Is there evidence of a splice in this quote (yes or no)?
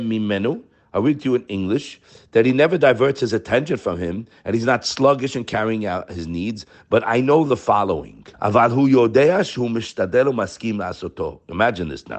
yes